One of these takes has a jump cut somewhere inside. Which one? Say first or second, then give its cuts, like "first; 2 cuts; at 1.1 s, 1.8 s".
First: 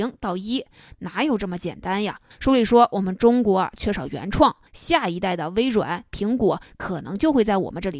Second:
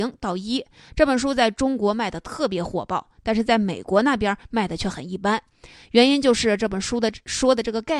first; 3 cuts; at 0.9 s, 2.3 s, 4.7 s